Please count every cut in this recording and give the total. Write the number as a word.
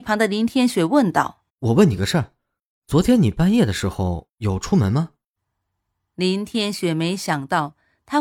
one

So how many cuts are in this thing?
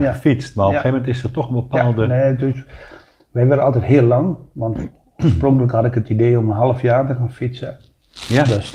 zero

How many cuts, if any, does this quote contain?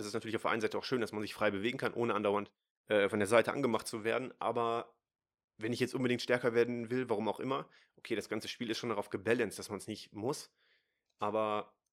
zero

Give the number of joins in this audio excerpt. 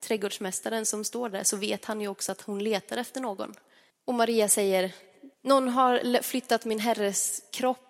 two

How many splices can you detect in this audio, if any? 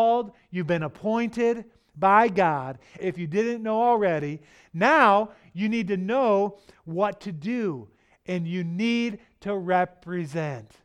one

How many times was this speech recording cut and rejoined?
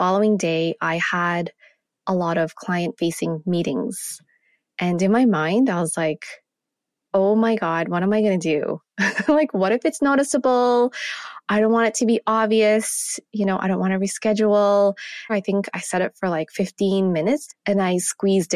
two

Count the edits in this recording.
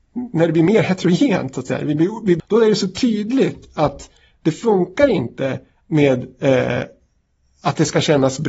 one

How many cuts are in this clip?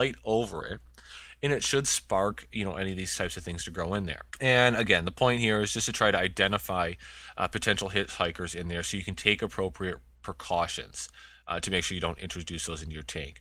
one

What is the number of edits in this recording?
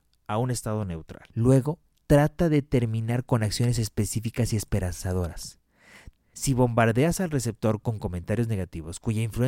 two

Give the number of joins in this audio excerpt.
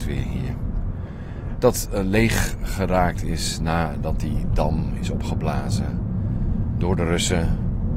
one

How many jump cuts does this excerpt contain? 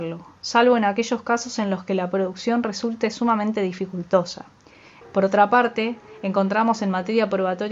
one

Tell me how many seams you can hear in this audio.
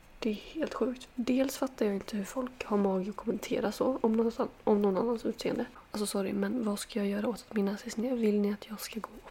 zero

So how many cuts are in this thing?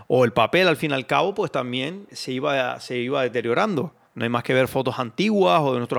one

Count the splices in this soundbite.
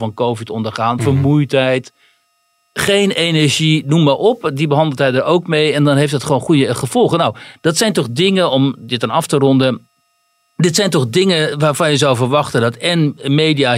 zero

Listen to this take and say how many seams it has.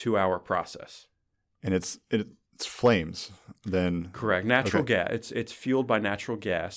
zero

